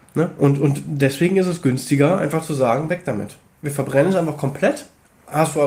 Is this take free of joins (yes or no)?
yes